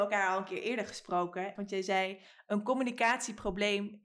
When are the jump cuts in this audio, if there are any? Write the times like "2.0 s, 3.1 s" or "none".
1.5 s